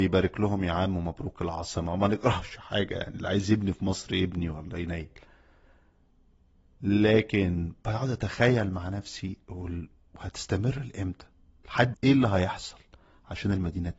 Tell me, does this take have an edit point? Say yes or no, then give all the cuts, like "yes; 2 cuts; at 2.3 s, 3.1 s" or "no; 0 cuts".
yes; 1 cut; at 11.9 s